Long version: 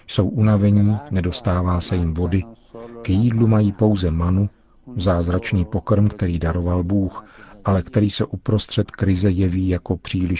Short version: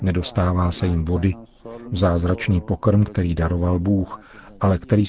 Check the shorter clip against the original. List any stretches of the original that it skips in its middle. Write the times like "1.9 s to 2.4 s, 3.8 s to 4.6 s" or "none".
2.9 s to 4.9 s